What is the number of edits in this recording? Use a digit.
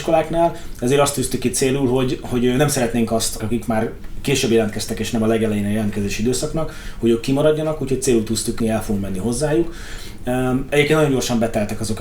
2